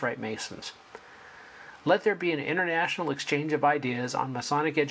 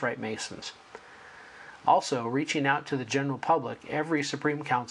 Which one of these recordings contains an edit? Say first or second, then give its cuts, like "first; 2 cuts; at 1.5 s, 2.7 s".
second; 1 cut; at 1.8 s